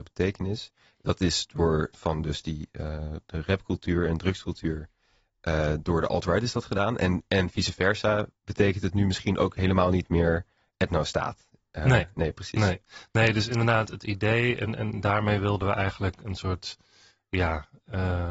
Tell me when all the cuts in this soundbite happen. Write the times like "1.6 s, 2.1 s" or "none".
1.9 s